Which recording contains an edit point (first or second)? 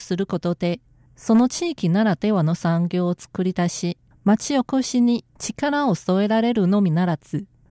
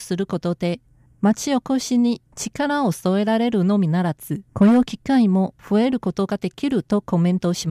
second